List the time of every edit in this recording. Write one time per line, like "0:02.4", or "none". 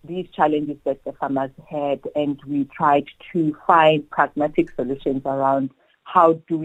none